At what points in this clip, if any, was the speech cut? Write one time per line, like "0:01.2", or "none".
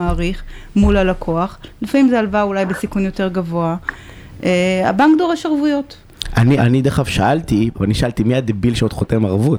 0:06.6
0:07.7